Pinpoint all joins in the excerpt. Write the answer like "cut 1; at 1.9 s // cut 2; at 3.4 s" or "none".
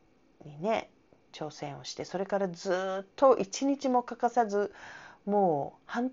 cut 1; at 3.1 s